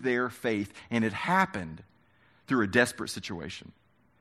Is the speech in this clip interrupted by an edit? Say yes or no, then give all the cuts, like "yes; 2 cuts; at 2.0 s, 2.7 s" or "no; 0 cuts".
no; 0 cuts